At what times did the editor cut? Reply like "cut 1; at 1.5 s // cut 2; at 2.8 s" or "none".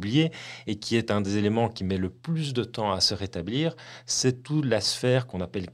none